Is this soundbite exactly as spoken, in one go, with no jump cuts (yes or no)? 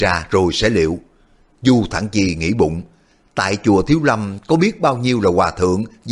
yes